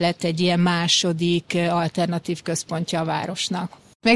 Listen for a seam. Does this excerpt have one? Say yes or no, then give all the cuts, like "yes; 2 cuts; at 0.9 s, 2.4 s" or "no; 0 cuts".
no; 0 cuts